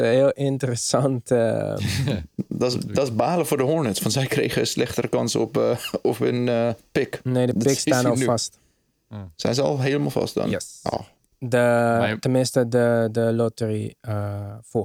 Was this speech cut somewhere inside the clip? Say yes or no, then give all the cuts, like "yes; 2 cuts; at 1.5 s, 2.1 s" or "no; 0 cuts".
no; 0 cuts